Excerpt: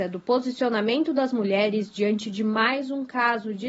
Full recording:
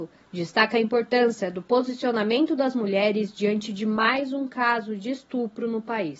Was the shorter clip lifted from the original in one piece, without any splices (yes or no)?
yes